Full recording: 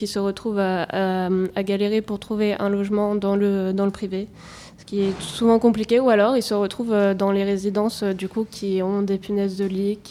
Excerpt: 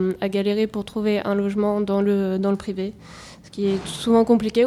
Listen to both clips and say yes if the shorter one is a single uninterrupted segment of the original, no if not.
yes